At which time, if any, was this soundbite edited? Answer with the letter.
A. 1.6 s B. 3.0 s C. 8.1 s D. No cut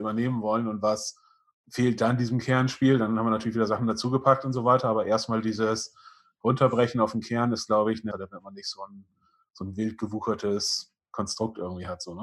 C